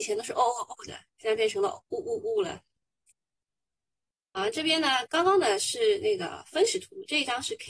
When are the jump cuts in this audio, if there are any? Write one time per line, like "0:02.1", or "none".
0:05.1